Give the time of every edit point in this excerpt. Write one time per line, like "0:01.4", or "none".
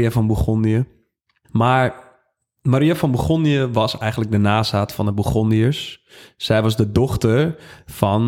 none